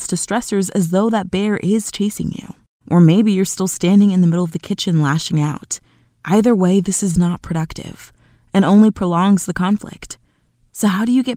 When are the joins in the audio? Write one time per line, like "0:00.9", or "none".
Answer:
0:02.8